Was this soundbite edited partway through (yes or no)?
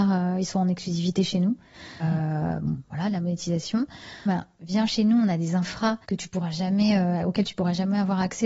yes